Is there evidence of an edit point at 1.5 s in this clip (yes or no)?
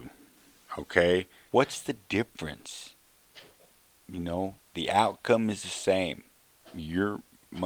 yes